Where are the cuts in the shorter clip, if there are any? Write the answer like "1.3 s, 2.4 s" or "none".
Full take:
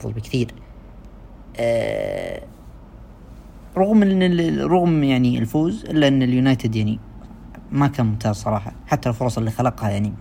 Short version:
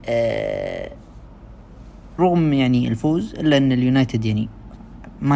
2.2 s